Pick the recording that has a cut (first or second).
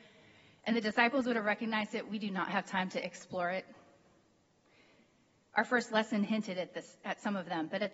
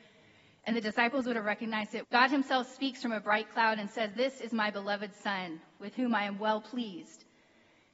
second